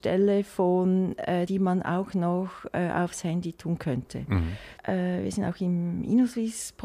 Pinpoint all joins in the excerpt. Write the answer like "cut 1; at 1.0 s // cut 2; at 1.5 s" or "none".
cut 1; at 1.5 s // cut 2; at 4.8 s